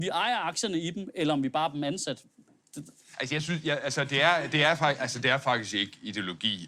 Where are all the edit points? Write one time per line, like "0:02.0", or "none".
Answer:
none